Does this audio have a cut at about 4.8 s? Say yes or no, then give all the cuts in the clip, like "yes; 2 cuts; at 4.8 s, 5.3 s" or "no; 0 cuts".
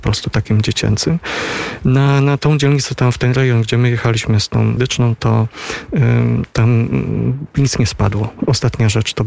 yes; 2 cuts; at 1.8 s, 4.8 s